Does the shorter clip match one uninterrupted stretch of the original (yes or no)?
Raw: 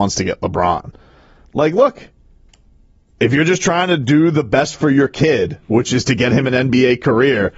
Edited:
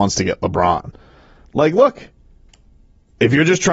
yes